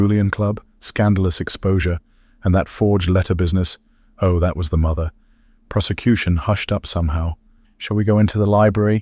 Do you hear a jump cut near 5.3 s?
no; 1 cut; at 7.6 s

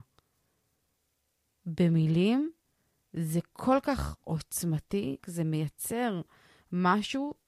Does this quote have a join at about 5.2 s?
yes; 1 cut; at 5.2 s

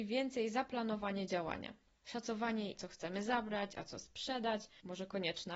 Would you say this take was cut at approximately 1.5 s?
no; 1 cut; at 2.7 s

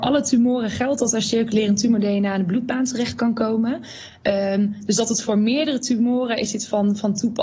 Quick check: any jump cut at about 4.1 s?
no; 0 cuts

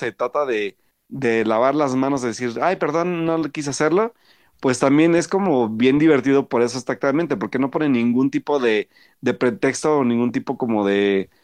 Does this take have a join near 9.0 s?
no; 0 cuts

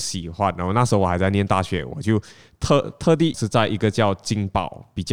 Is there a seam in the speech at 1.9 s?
no; 1 cut; at 3.3 s

